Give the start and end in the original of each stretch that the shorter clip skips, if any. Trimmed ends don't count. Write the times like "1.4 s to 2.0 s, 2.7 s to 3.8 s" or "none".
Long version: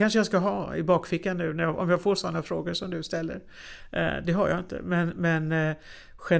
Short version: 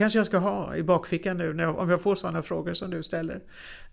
none